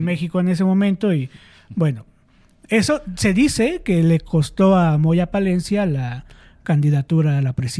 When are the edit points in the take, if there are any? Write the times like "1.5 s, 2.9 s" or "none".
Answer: none